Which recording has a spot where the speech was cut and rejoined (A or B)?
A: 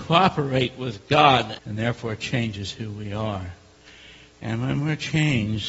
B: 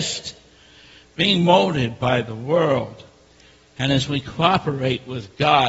A